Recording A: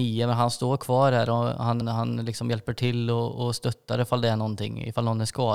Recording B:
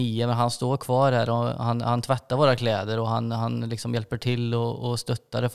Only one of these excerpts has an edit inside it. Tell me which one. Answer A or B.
A